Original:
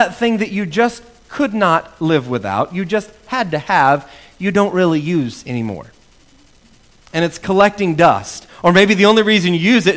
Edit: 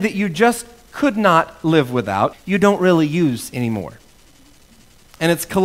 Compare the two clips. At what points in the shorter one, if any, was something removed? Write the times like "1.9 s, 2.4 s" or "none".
2.3 s